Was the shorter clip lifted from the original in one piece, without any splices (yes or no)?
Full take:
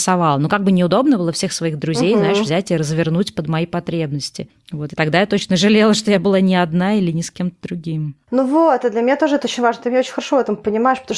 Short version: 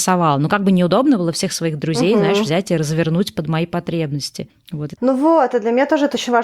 no